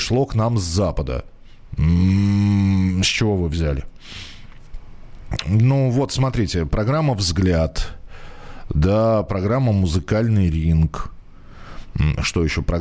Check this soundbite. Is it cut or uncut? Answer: uncut